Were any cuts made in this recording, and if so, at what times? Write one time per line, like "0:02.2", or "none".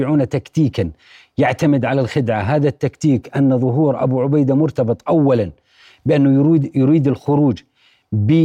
none